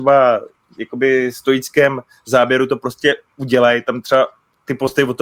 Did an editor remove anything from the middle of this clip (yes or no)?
no